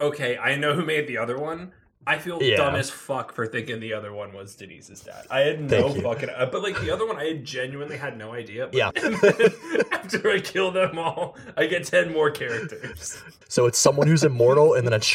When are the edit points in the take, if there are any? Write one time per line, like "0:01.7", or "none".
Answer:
0:08.9
0:13.4